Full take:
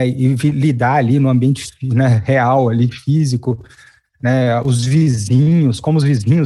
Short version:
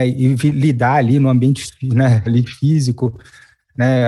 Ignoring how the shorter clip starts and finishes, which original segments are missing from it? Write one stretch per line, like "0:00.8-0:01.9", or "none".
0:02.3-0:02.7